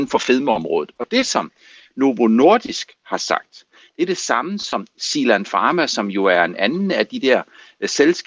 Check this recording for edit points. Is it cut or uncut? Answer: uncut